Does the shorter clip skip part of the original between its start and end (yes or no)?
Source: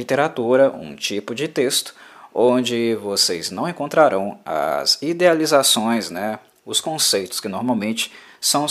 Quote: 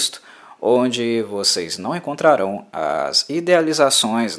no